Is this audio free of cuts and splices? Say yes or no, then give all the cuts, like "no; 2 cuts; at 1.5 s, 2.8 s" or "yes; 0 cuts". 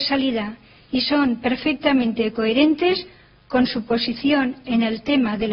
yes; 0 cuts